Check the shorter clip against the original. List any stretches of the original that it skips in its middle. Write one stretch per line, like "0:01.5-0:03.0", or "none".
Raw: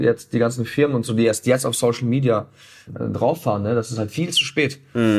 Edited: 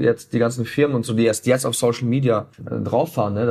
0:02.5-0:02.8